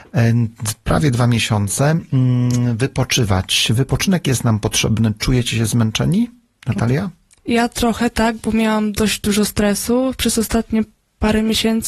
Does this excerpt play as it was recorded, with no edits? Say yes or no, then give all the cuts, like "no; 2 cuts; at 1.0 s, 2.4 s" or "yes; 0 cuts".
yes; 0 cuts